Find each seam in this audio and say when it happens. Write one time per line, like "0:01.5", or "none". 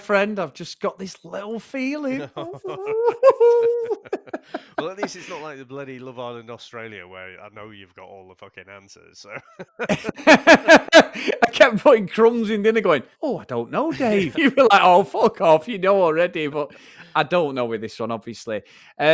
0:13.1
0:14.3

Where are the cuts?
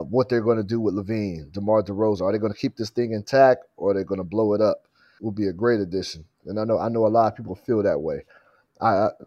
0:05.2
0:06.3

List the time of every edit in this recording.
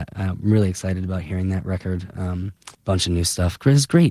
0:02.7

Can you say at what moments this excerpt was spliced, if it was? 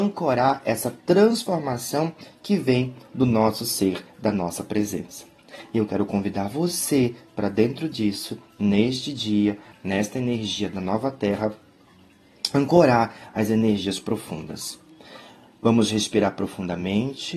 0:09.7

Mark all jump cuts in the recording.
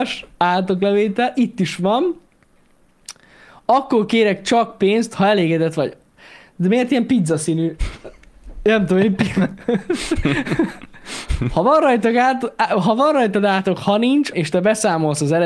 0:14.3

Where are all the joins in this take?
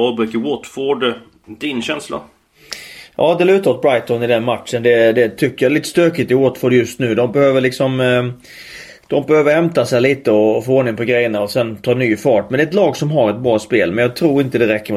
none

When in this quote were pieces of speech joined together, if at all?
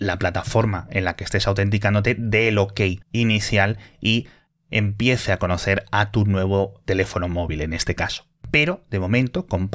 0:03.0
0:08.4

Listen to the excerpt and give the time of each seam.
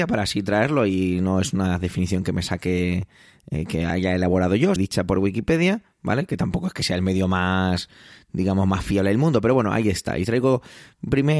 0:04.8

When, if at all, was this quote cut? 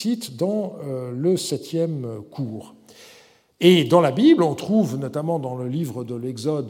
none

